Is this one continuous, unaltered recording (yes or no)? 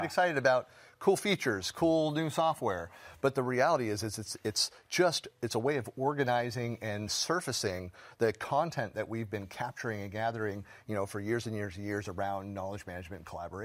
yes